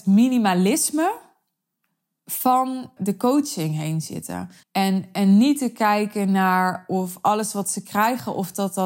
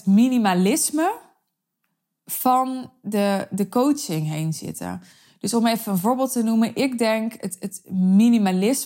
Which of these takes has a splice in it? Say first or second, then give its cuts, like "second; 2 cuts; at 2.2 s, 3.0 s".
first; 2 cuts; at 3.0 s, 4.6 s